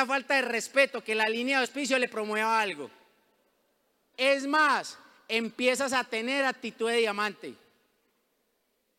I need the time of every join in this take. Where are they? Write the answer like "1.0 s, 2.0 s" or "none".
4.1 s